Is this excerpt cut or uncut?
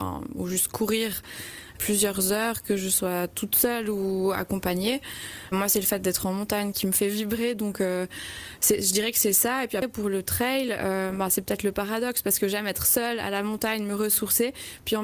uncut